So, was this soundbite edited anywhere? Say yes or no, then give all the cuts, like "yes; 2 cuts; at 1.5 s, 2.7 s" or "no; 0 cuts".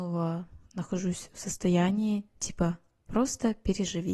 no; 0 cuts